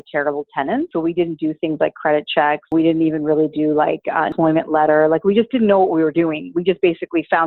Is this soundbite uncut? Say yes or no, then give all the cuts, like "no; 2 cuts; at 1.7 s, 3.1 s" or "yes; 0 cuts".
yes; 0 cuts